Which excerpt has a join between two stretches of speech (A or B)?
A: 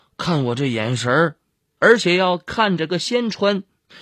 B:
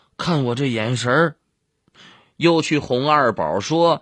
A